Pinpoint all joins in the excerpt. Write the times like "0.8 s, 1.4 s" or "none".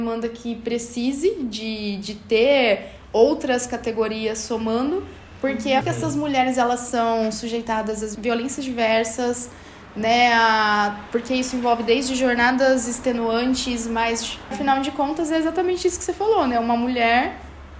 5.8 s, 8.1 s, 14.5 s